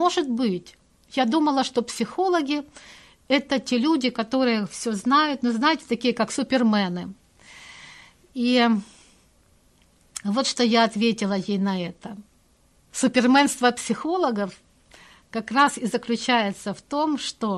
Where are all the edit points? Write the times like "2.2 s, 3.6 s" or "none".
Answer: 12.9 s